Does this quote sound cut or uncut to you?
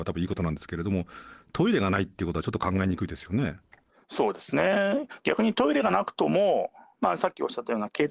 uncut